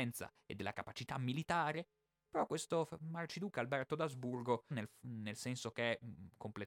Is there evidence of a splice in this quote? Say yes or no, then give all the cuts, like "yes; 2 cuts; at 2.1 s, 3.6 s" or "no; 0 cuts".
yes; 1 cut; at 4.7 s